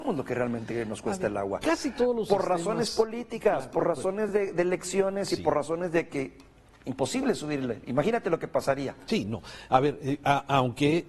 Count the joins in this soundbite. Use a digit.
0